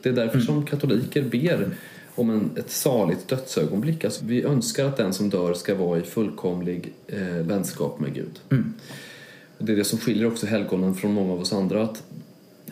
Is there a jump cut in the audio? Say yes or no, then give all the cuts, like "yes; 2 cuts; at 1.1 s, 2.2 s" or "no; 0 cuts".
yes; 2 cuts; at 4.2 s, 7.5 s